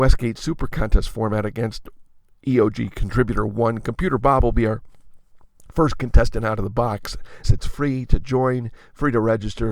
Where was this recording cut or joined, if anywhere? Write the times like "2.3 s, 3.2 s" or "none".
7.4 s